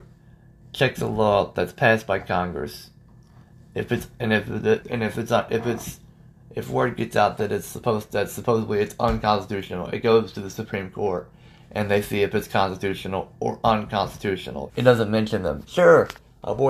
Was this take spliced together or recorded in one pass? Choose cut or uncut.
cut